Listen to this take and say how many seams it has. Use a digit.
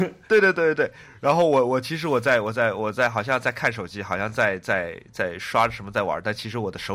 0